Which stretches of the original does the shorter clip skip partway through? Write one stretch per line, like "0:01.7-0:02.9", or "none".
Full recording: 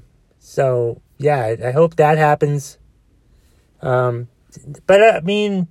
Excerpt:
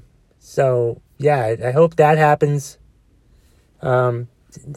none